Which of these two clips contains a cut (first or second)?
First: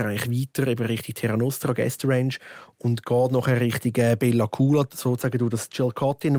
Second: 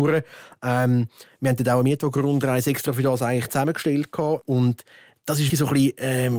second